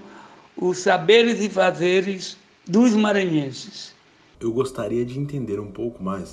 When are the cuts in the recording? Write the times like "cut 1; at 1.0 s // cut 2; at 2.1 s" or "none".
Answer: cut 1; at 4.3 s